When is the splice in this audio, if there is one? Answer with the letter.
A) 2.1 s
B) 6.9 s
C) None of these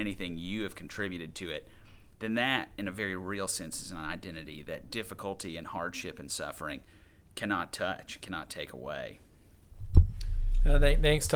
C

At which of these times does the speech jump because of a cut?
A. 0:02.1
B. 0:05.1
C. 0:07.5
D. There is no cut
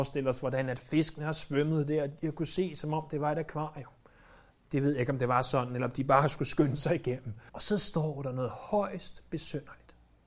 C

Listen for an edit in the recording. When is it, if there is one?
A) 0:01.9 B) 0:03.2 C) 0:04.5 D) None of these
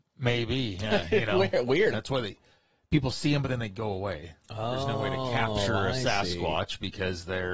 A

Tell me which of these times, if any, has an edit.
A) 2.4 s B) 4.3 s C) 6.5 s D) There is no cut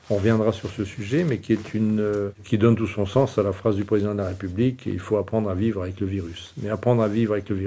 A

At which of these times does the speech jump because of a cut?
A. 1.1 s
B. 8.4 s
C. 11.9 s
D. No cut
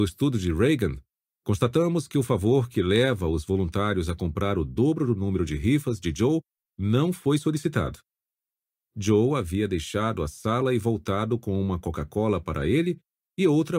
D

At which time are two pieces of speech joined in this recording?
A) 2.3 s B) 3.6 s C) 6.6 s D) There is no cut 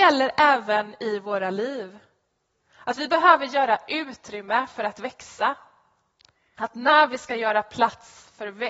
C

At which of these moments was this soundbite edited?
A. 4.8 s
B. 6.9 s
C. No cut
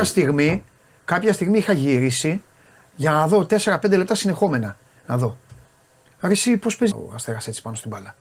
B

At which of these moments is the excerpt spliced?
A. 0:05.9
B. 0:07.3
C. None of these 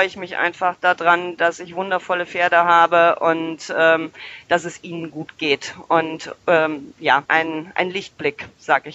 B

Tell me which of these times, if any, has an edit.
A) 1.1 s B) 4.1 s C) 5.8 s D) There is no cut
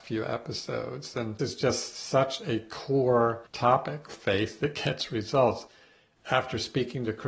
B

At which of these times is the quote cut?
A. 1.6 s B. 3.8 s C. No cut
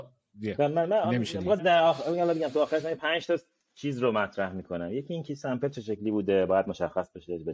A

